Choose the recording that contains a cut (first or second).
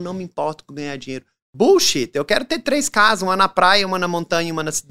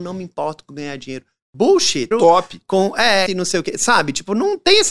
second